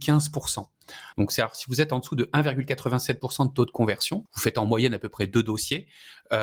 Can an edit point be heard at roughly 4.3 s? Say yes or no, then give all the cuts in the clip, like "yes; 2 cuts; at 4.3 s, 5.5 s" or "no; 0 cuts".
yes; 2 cuts; at 1.1 s, 4.3 s